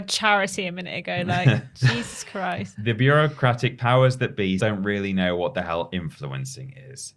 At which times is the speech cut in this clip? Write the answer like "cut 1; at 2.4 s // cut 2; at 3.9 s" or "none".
cut 1; at 4.6 s